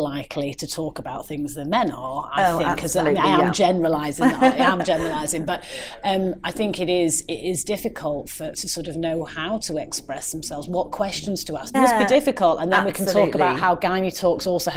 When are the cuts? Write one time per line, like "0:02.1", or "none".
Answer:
0:08.5
0:11.7